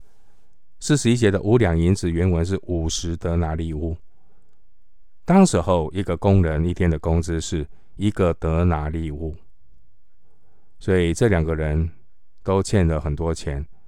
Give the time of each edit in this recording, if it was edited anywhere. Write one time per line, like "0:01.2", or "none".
none